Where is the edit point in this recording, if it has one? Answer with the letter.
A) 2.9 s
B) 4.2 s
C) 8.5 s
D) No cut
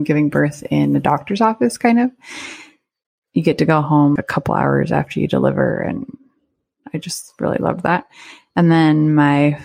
B